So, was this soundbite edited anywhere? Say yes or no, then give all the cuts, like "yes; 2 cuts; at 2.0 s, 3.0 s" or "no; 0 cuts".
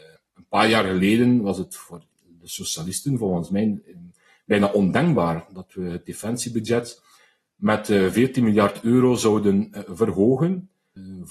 no; 0 cuts